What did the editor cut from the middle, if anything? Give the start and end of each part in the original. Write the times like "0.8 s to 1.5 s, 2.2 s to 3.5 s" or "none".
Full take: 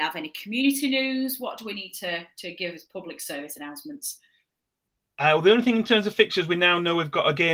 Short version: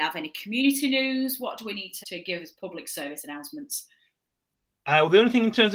2.0 s to 2.3 s